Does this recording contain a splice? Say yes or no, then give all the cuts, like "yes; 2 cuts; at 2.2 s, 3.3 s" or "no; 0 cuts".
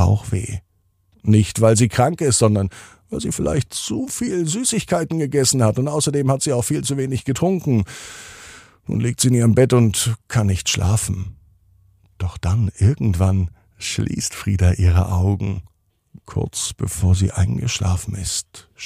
no; 0 cuts